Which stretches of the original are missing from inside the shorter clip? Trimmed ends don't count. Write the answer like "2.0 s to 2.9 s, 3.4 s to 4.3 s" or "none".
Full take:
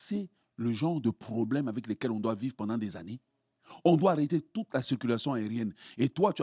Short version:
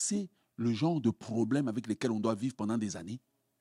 none